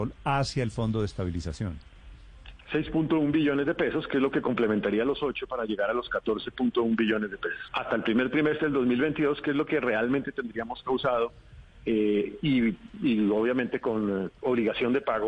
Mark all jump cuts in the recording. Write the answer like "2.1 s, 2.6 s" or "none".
7.7 s